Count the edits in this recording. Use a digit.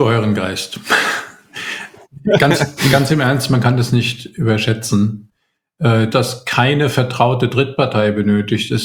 1